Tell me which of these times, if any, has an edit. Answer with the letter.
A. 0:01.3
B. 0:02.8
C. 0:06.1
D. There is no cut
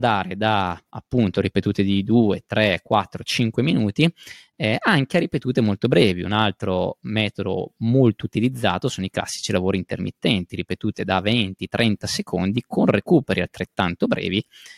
D